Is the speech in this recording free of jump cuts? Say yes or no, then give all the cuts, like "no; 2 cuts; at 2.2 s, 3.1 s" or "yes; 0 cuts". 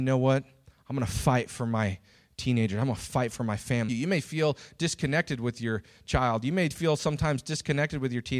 no; 1 cut; at 3.9 s